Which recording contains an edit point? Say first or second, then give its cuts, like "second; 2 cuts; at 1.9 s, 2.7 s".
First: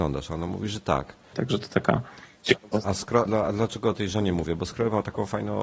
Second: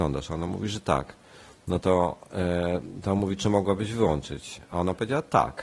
first; 2 cuts; at 1.3 s, 3.3 s